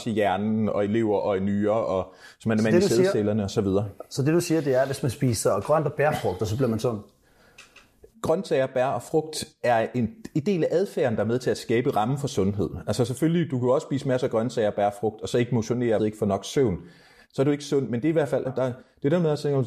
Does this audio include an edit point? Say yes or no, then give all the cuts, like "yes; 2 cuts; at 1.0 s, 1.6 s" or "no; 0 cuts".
yes; 2 cuts; at 16.0 s, 18.4 s